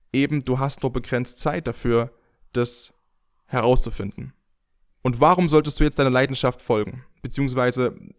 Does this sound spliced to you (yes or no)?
no